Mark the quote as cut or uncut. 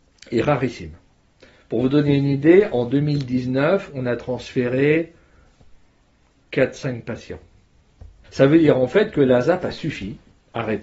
cut